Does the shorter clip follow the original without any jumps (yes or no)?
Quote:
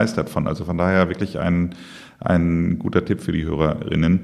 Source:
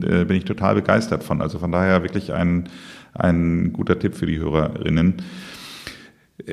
yes